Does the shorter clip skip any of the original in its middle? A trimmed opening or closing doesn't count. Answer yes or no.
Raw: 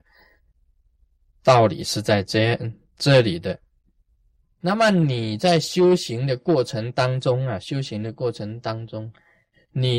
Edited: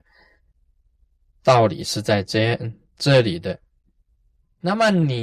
no